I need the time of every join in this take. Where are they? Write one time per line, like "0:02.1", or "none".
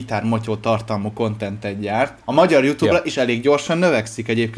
0:02.2